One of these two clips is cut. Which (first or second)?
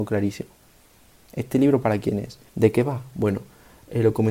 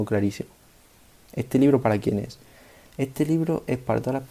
first